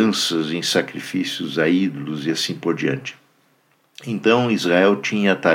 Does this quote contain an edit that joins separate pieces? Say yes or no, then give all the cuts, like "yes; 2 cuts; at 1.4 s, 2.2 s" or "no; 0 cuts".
no; 0 cuts